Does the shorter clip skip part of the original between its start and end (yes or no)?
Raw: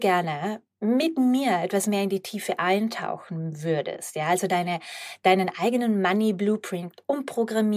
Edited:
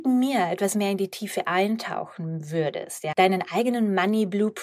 yes